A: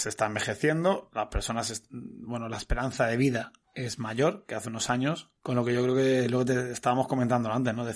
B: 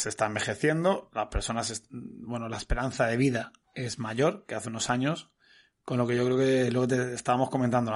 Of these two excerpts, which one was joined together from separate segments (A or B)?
A